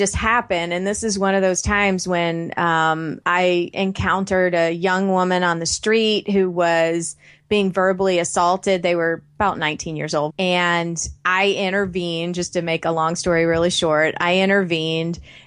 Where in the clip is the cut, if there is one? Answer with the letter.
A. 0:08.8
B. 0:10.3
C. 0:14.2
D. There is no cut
B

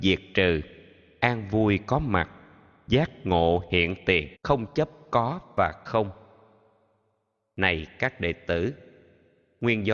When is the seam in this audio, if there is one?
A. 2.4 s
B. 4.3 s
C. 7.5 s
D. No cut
B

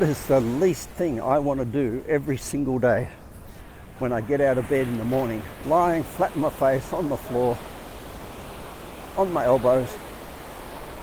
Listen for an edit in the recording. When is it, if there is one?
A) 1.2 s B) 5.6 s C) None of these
B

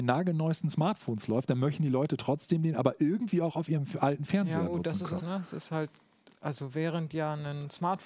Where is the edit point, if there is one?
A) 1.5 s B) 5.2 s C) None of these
B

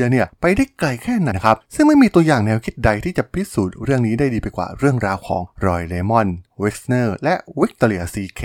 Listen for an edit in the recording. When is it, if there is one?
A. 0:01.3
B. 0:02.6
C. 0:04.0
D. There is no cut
A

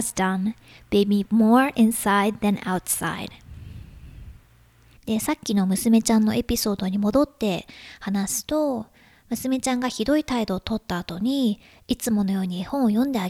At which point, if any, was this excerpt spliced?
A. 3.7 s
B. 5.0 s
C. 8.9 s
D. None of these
B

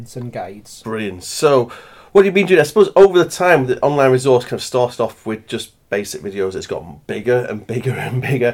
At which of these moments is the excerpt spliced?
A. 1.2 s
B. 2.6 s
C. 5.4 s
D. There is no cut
D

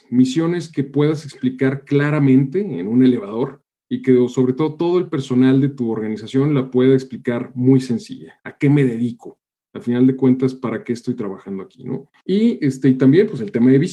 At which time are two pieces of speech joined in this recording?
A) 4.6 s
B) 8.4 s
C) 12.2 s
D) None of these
C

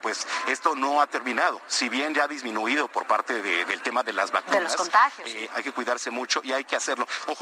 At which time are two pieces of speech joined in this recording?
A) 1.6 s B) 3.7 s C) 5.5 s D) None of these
C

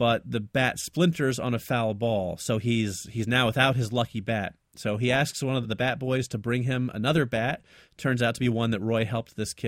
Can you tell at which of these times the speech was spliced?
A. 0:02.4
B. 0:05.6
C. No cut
B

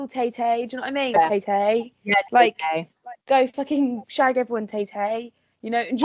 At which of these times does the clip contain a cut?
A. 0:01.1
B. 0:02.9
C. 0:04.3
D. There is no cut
A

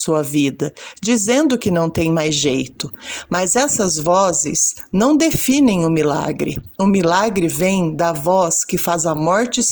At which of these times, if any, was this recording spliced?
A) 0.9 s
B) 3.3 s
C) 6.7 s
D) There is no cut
D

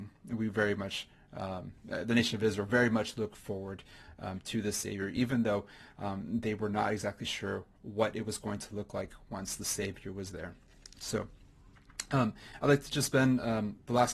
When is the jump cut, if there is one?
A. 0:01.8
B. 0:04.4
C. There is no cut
C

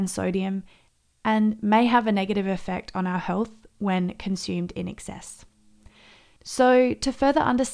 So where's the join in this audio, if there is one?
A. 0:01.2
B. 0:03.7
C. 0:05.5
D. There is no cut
D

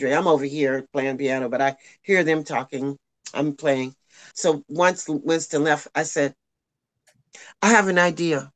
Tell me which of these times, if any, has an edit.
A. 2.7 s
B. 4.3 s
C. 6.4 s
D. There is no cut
B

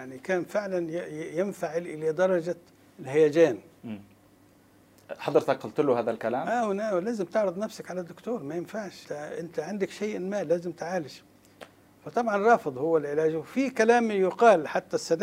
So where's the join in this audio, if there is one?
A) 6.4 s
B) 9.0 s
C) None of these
B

